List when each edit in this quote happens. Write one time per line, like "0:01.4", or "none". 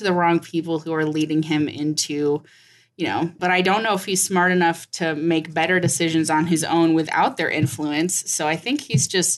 0:03.4